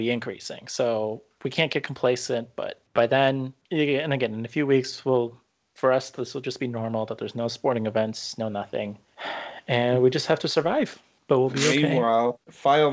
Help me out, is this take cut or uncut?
uncut